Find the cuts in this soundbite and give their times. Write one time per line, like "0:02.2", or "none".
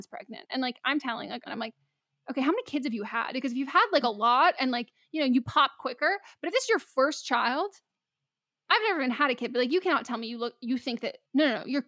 0:01.5